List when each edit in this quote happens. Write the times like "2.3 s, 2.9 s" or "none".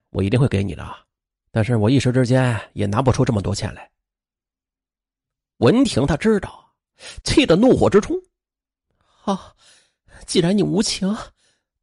7.2 s

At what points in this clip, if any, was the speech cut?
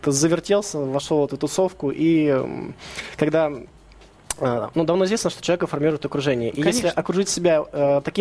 none

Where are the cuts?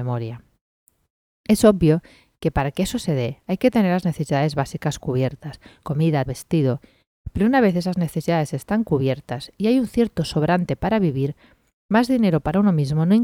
6.3 s

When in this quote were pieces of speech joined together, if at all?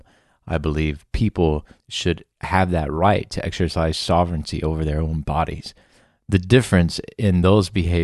none

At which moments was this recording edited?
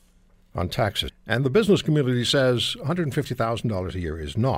1.1 s

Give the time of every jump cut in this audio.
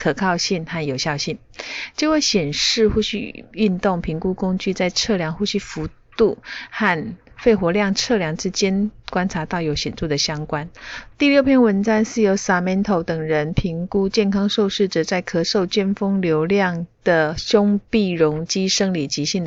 11.1 s

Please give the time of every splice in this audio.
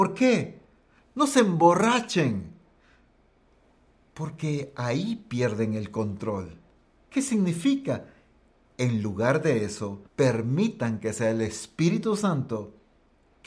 8.6 s, 10.1 s

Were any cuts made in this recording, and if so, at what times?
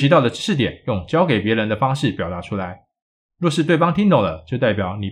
none

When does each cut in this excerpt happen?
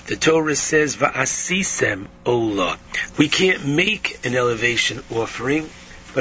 3.1 s

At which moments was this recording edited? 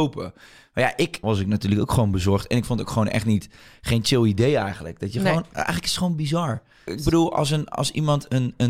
1.2 s, 6.9 s

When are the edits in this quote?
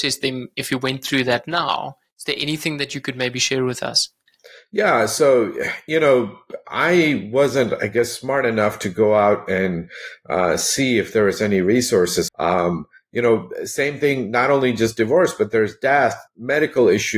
12.3 s, 16.3 s

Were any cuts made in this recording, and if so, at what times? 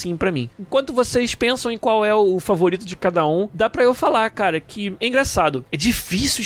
none

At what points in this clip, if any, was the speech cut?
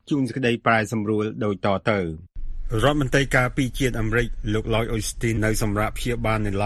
5.4 s

